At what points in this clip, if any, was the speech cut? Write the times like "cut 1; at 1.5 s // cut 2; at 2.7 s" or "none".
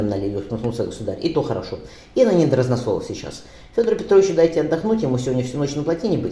none